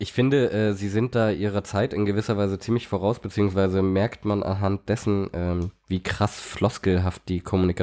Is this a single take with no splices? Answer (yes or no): yes